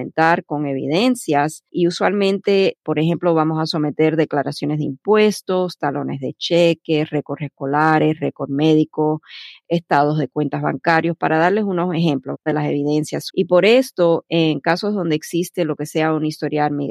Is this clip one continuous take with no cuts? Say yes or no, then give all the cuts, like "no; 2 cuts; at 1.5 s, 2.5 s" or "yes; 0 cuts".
no; 2 cuts; at 1.7 s, 13.3 s